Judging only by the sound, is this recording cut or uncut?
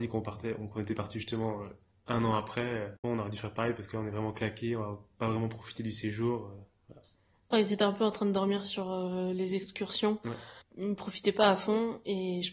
cut